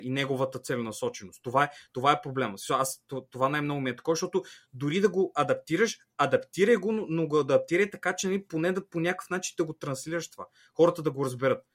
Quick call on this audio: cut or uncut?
uncut